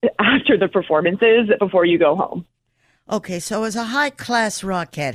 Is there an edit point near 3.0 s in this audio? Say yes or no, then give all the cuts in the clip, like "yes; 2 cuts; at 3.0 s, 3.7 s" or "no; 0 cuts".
no; 0 cuts